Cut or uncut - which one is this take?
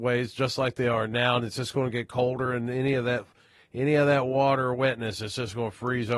uncut